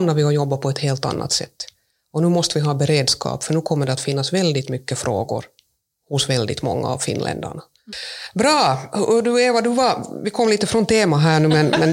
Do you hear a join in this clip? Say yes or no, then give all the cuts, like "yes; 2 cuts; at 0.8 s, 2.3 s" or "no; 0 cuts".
no; 0 cuts